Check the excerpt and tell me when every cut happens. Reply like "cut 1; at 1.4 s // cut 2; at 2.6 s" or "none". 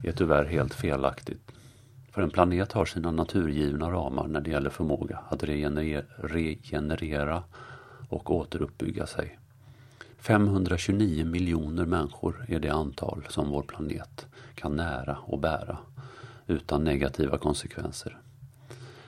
cut 1; at 10.1 s